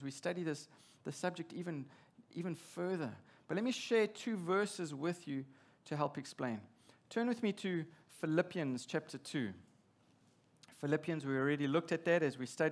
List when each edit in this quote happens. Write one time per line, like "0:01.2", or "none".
none